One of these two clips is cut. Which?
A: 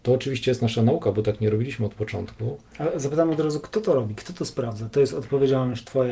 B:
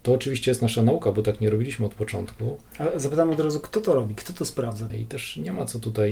B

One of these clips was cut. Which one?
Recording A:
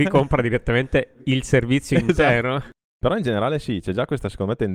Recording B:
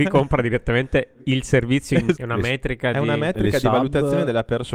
B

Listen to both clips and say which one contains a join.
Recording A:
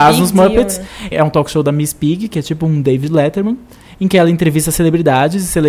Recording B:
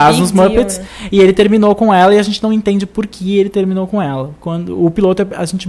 A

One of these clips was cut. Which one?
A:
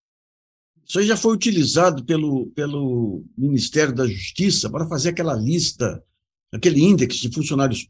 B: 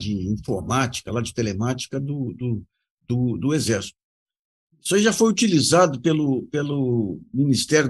B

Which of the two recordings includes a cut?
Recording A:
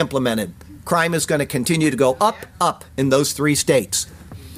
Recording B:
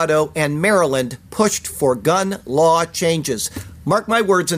A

